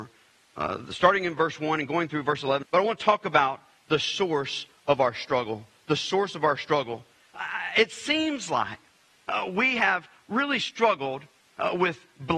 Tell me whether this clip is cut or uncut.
cut